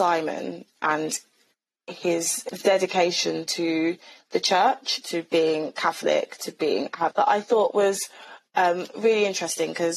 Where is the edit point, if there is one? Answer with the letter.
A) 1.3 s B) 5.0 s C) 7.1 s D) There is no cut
C